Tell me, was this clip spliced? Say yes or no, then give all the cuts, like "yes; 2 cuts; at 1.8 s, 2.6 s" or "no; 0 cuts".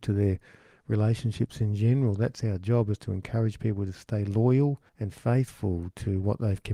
yes; 1 cut; at 4.9 s